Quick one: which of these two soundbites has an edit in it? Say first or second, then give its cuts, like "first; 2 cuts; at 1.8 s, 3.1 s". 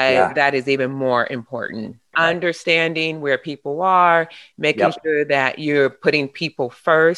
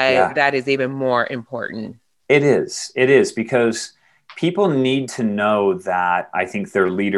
first; 1 cut; at 2.1 s